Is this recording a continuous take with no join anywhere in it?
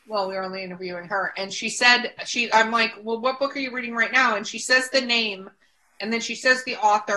yes; 0 cuts

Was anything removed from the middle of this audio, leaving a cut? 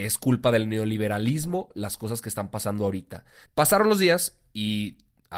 yes; 1 cut; at 3.5 s

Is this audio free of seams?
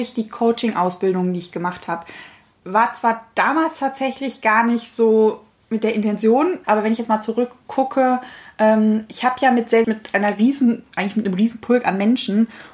no; 2 cuts; at 6.6 s, 9.8 s

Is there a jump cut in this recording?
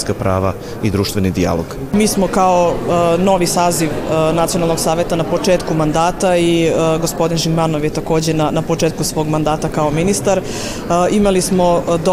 no; 0 cuts

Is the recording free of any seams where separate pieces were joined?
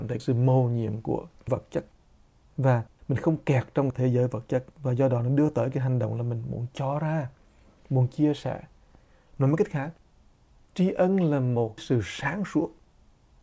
yes; 0 cuts

